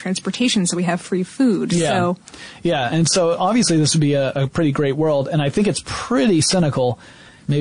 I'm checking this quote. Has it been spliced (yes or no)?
no